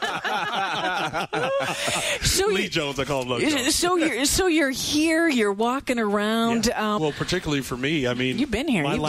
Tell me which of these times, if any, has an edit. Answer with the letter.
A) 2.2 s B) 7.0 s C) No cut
B